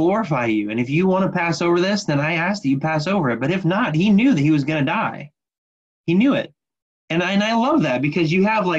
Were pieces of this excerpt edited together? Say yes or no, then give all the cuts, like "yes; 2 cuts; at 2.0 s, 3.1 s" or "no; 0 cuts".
yes; 1 cut; at 6.9 s